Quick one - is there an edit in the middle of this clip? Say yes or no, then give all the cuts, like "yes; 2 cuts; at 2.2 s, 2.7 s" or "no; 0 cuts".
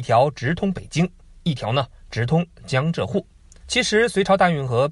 yes; 1 cut; at 3.6 s